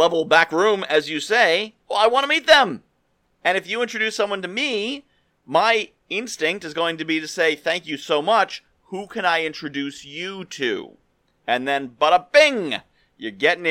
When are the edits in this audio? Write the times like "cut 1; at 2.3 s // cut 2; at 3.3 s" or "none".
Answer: cut 1; at 1.8 s